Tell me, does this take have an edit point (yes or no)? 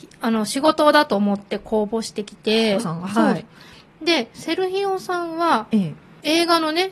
yes